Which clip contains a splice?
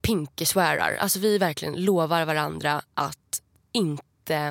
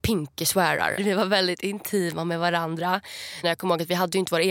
second; 2 cuts; at 1.0 s, 3.4 s

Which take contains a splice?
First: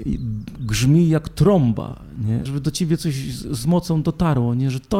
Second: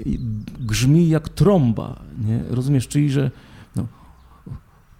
first; 1 cut; at 2.4 s

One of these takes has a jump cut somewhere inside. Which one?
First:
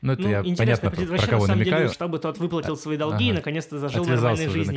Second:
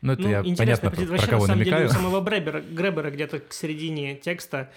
first; 1 cut; at 1.9 s

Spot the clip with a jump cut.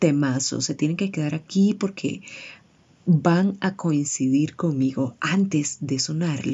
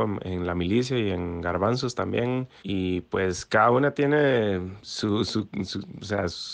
second; 1 cut; at 2.6 s

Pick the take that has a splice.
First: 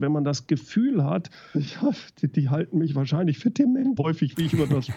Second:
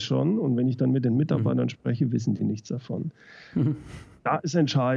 first; 2 cuts; at 1.5 s, 4.0 s

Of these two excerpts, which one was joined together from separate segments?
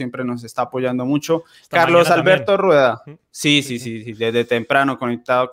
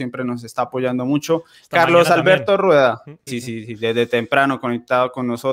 second; 1 cut; at 3.3 s

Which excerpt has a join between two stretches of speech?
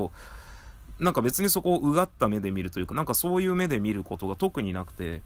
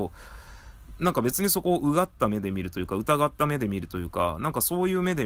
first; 1 cut; at 2.9 s

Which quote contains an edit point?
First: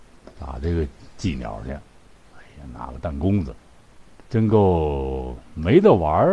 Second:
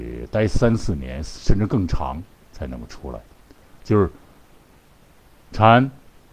first; 1 cut; at 4.2 s

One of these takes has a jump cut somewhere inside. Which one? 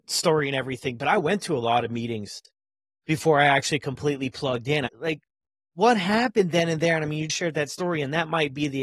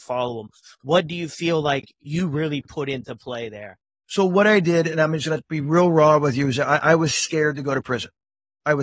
first; 1 cut; at 7.3 s

